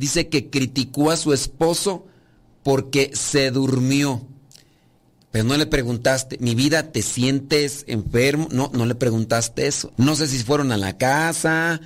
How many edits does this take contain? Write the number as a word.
one